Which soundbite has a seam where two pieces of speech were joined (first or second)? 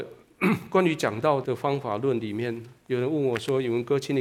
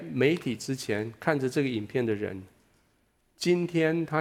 first